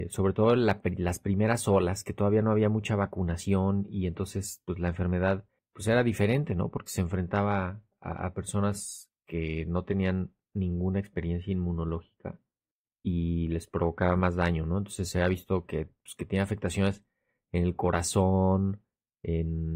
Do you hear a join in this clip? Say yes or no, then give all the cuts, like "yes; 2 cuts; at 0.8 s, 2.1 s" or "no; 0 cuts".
no; 0 cuts